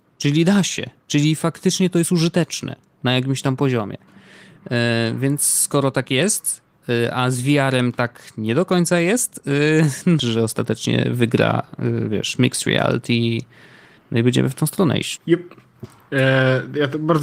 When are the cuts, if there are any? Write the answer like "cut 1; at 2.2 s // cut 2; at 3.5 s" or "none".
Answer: cut 1; at 10.2 s // cut 2; at 15.2 s